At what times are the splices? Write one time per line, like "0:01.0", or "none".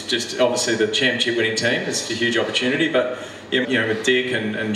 0:02.1
0:03.6

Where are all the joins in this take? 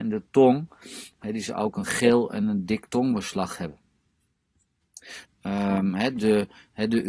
0:05.2

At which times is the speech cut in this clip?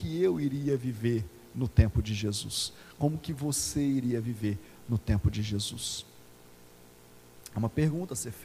none

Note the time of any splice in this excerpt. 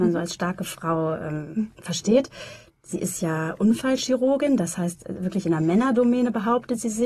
none

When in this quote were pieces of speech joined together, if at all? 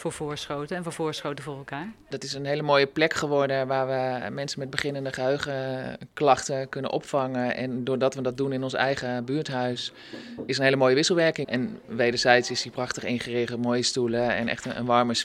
0:02.1
0:11.4

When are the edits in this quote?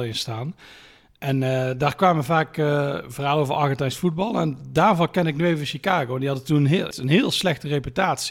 0:06.9

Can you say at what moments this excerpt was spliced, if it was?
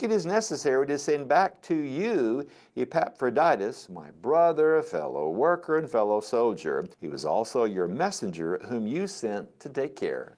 0:06.9

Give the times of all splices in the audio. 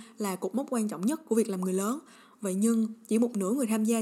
none

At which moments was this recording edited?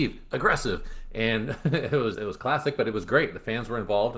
0:02.1

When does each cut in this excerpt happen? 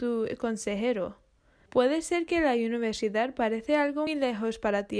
0:01.7
0:04.1

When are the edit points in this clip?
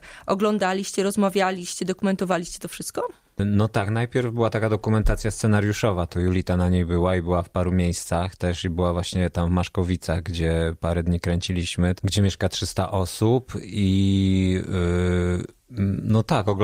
0:12.0

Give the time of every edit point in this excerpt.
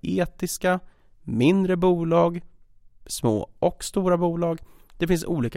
none

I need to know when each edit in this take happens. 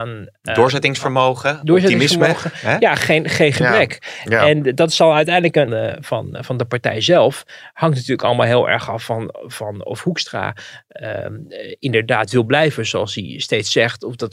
0:05.7

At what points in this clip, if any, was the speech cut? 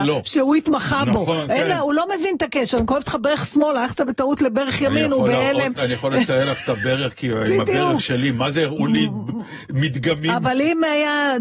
none

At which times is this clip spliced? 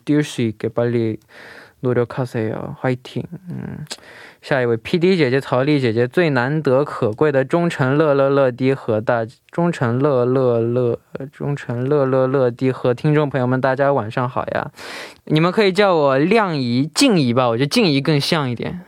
none

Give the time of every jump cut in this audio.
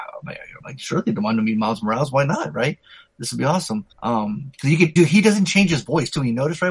0:03.9
0:05.0

